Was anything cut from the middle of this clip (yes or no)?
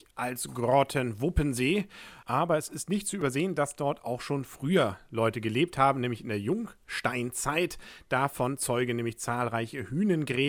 no